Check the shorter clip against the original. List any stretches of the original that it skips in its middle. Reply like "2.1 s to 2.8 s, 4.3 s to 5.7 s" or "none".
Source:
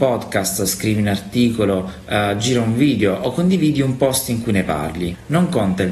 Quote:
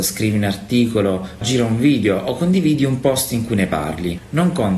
2.1 s to 2.4 s